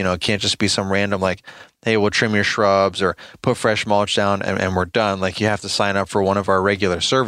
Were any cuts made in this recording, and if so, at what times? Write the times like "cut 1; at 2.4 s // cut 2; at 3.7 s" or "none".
none